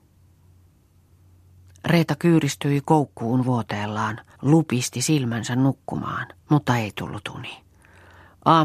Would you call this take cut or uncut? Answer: cut